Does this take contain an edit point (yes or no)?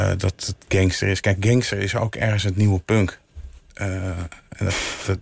no